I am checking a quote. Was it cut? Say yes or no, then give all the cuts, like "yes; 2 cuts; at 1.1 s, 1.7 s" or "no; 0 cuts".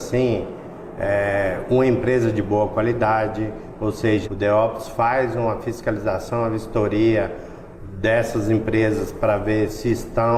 yes; 1 cut; at 4.2 s